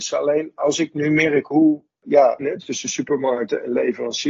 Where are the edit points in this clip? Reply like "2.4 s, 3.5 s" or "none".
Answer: 2.4 s